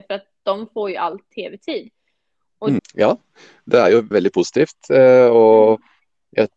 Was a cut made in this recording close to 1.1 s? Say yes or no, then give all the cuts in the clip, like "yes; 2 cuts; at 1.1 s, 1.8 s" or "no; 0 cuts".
no; 2 cuts; at 2.8 s, 4.1 s